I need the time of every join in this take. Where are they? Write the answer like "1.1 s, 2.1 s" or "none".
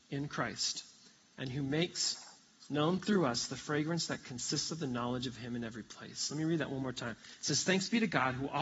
none